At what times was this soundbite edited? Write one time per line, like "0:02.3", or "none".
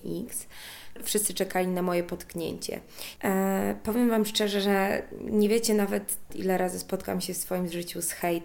0:01.0
0:03.2
0:06.3